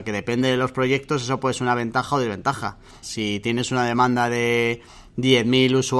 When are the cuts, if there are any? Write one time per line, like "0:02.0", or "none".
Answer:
0:03.0